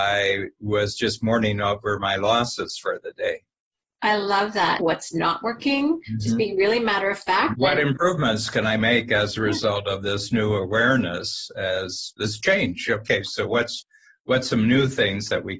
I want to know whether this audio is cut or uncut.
cut